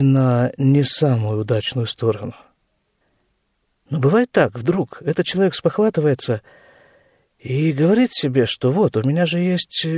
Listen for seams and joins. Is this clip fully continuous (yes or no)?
yes